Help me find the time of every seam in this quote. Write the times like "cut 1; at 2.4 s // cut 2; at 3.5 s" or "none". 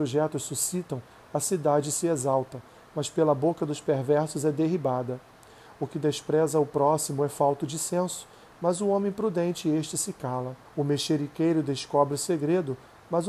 cut 1; at 10.7 s